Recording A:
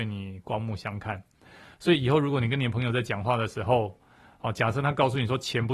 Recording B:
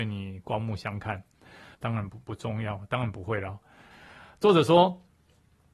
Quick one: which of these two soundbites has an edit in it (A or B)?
B